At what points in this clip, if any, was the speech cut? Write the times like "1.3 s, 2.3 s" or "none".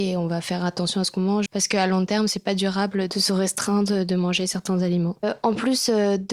1.5 s